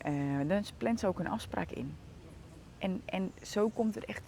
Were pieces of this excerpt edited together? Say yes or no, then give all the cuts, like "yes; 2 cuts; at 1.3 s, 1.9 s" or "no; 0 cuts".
no; 0 cuts